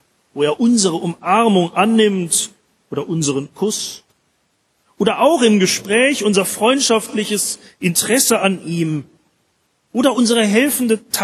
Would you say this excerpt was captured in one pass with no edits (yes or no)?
yes